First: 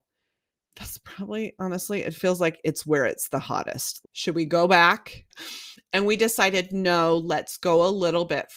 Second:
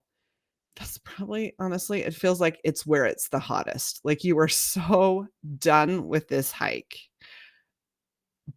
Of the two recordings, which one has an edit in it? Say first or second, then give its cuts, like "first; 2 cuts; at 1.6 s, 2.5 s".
first; 2 cuts; at 4.0 s, 5.3 s